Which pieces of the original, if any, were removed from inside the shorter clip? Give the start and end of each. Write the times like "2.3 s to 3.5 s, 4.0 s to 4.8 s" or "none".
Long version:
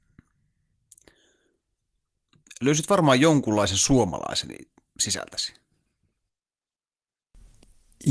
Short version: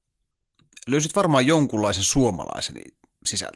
none